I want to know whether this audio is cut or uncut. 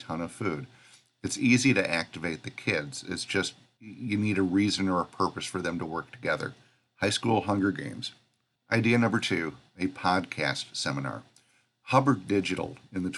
uncut